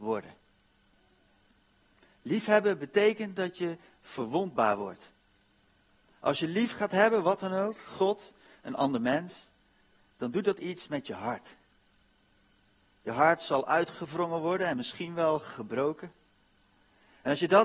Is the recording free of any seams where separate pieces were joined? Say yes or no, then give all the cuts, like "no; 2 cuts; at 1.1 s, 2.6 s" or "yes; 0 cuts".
yes; 0 cuts